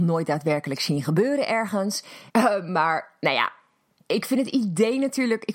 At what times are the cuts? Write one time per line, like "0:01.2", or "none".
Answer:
0:02.3